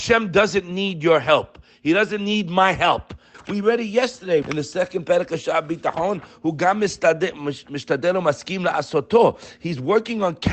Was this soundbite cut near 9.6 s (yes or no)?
no